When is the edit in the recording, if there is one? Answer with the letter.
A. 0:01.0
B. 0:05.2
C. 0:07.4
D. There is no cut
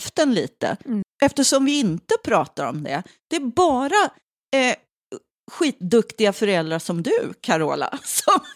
A